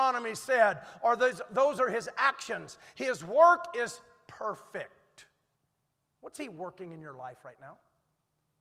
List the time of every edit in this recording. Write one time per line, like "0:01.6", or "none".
none